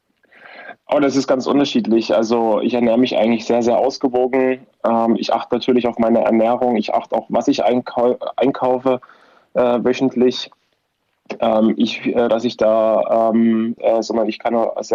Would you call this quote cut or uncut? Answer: cut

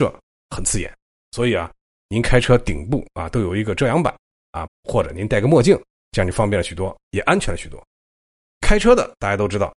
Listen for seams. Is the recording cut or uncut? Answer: cut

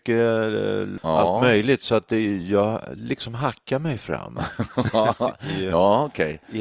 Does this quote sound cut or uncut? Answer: uncut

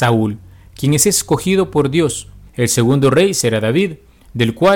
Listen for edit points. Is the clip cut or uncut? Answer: cut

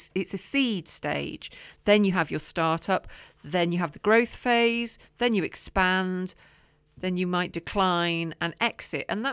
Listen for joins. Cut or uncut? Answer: cut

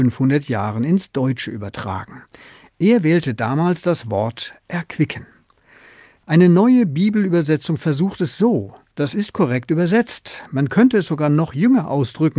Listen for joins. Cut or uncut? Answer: cut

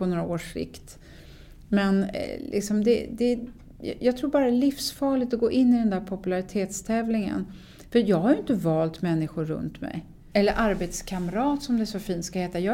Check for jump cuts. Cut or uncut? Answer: cut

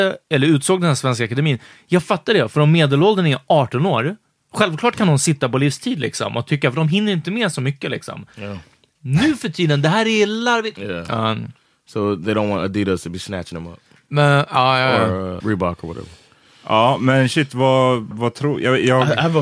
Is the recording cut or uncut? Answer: cut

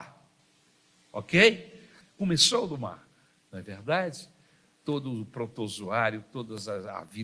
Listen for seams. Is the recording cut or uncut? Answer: cut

